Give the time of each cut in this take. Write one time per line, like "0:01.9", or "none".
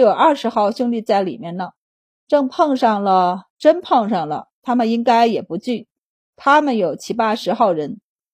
0:03.5